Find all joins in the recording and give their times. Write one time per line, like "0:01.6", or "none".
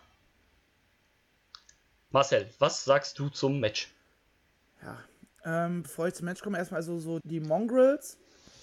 0:07.2